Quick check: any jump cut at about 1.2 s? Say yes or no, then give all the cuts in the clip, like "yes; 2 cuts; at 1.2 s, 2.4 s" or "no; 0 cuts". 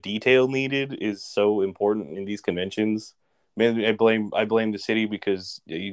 no; 1 cut; at 3.4 s